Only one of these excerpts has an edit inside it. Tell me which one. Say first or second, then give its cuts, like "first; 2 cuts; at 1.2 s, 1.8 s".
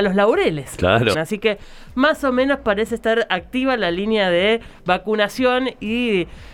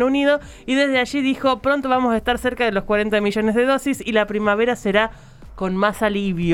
first; 1 cut; at 1.1 s